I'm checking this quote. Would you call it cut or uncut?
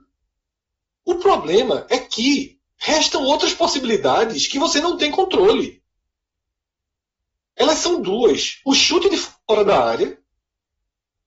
cut